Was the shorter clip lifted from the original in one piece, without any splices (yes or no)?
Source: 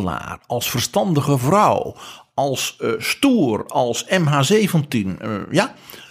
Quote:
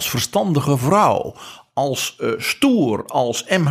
yes